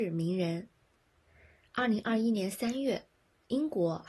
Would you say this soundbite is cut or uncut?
uncut